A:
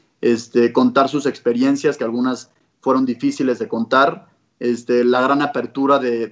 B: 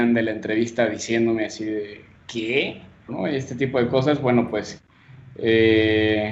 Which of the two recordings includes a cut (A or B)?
B